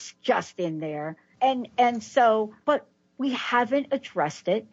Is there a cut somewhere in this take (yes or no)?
yes